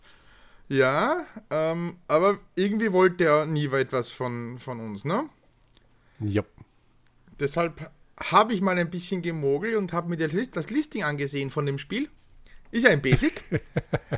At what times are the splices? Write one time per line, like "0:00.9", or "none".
none